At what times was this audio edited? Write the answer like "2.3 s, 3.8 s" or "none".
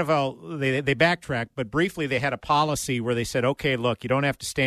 none